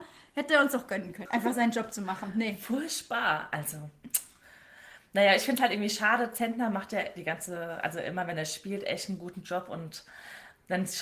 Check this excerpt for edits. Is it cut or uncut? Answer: cut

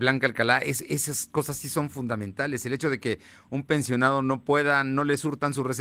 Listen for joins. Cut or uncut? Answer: uncut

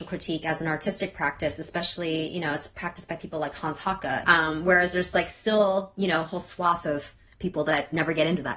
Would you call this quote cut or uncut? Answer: cut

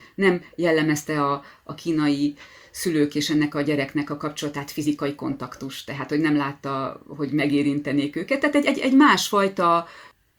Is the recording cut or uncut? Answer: uncut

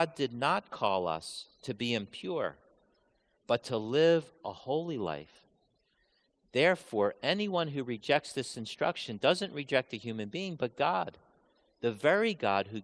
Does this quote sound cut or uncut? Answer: uncut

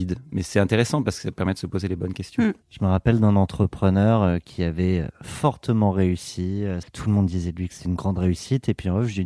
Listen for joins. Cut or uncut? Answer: cut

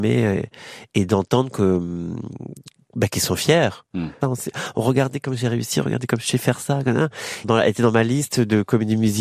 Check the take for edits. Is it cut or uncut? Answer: cut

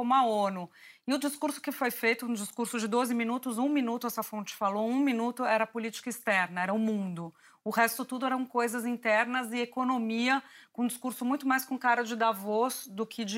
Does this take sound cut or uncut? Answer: uncut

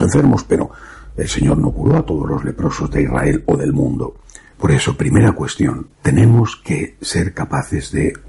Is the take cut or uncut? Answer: cut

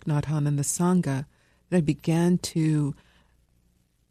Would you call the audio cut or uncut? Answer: uncut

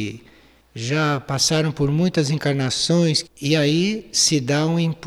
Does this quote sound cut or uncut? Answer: cut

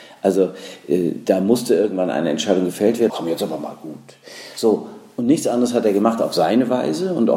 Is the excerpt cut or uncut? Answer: cut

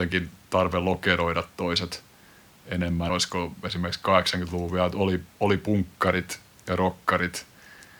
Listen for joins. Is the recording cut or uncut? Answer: cut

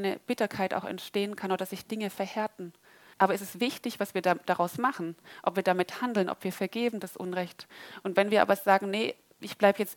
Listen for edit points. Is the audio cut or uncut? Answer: cut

